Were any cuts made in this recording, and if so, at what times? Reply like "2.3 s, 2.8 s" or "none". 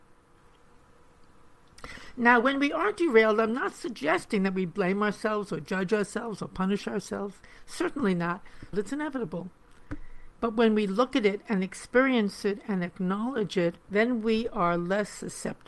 8.7 s, 10.3 s, 13.8 s